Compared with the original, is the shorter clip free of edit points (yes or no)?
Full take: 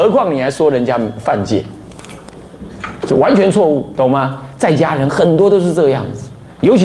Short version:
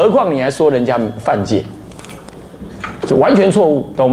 yes